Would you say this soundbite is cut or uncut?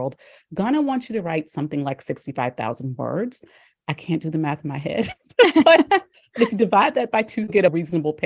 uncut